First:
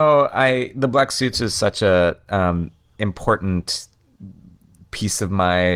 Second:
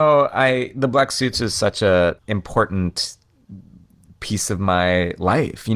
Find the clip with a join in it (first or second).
second